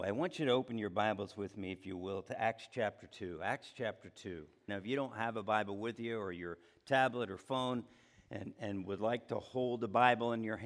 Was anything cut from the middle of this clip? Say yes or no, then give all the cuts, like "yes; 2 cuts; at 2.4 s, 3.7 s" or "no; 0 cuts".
yes; 1 cut; at 4.7 s